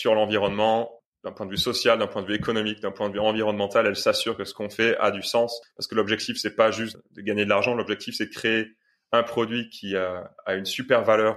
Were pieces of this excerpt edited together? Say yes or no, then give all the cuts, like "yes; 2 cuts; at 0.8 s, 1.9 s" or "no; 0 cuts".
no; 0 cuts